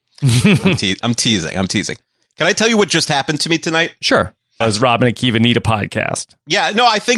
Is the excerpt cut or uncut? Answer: cut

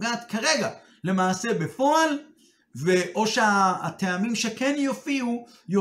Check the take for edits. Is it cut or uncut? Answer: uncut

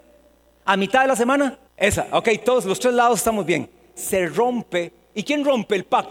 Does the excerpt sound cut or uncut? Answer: cut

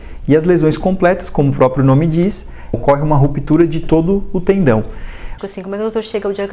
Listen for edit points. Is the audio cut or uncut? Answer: cut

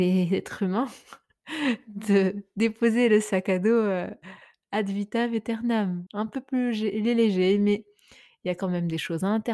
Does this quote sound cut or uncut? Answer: cut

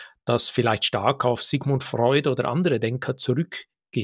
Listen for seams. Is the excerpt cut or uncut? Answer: uncut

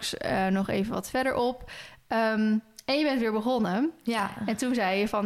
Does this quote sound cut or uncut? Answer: uncut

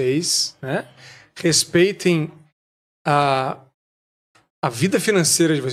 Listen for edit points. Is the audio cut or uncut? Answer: uncut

